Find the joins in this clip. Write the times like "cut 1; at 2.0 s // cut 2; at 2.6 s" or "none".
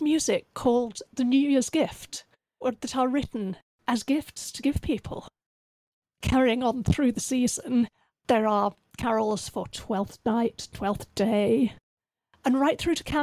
cut 1; at 2.6 s